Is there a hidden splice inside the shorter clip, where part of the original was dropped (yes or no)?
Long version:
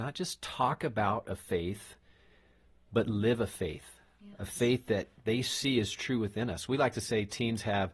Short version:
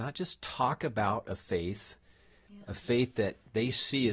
yes